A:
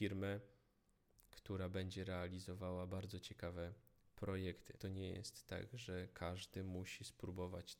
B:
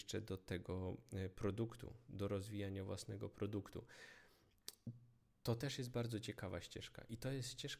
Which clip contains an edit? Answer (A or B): A